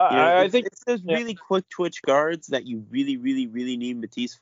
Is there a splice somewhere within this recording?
no; 0 cuts

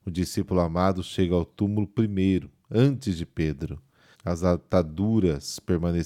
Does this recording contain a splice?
yes; 1 cut; at 4.1 s

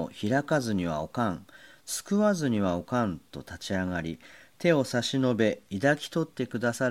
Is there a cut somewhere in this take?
no; 0 cuts

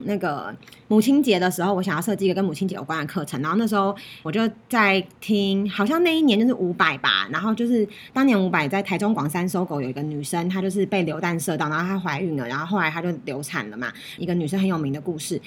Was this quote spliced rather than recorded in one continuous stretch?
yes; 2 cuts; at 4.3 s, 14.2 s

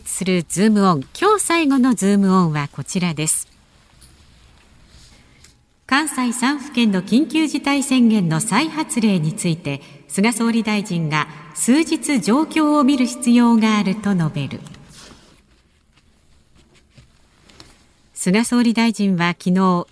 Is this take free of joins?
yes; 0 cuts

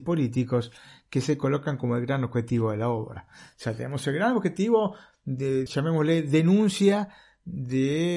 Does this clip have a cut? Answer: yes; 1 cut; at 5.7 s

